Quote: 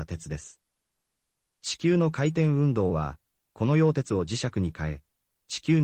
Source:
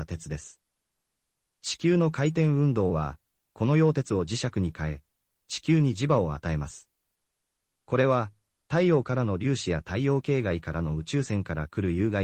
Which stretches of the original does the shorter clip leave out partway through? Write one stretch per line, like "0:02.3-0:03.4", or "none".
none